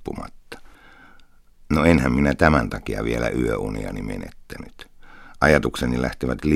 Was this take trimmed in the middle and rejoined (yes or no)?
no